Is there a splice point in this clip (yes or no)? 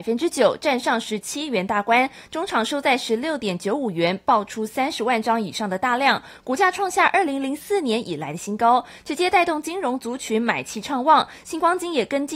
no